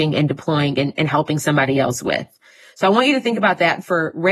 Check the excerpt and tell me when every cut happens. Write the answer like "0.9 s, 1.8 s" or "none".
none